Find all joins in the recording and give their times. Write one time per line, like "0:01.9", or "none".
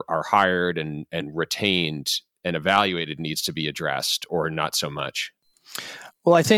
0:04.3